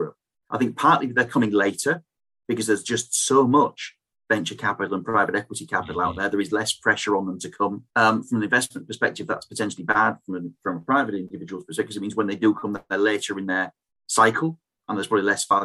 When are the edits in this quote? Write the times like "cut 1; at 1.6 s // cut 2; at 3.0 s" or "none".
cut 1; at 7.9 s